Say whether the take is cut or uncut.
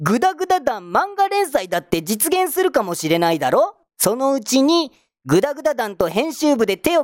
cut